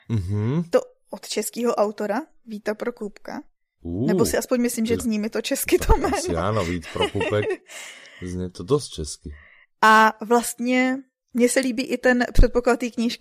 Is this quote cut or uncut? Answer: cut